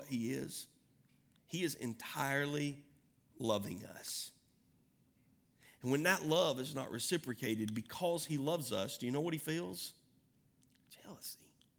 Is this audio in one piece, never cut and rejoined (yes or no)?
yes